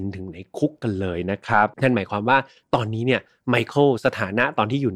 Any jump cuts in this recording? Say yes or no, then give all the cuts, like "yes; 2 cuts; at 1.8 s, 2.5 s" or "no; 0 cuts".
yes; 1 cut; at 1.7 s